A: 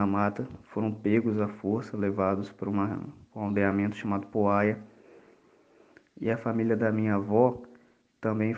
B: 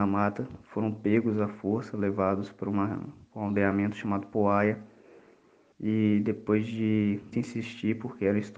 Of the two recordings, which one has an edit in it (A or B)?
B